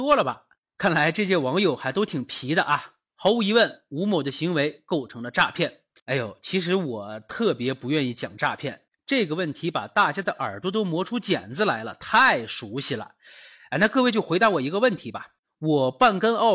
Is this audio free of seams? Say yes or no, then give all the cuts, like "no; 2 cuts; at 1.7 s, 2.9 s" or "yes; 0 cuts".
yes; 0 cuts